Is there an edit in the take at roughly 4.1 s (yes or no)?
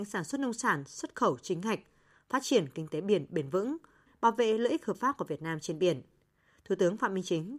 yes